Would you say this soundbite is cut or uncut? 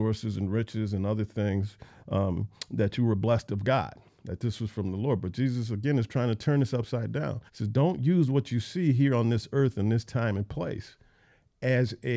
cut